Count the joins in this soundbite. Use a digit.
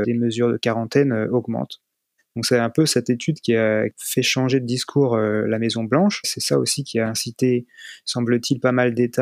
1